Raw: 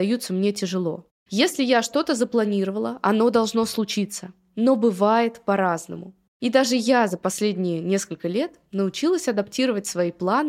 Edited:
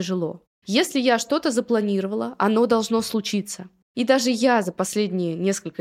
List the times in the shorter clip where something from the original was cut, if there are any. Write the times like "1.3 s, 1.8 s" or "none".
3.8 s